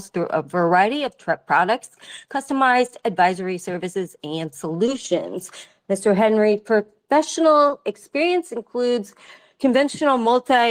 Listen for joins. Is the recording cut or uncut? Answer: uncut